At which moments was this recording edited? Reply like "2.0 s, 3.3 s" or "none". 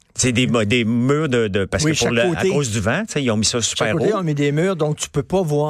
none